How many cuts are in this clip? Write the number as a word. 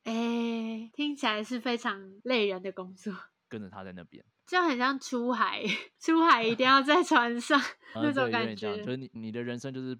two